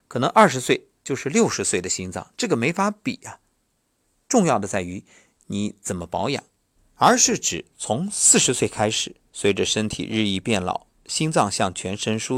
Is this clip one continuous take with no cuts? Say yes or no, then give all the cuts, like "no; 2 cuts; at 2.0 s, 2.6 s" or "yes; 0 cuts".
no; 2 cuts; at 6.8 s, 9.3 s